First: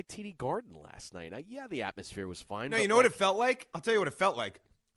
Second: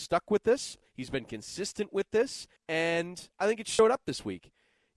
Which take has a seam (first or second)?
second